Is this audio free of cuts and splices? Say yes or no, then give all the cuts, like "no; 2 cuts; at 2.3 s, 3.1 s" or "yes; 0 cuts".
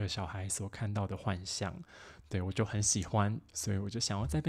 no; 1 cut; at 3.5 s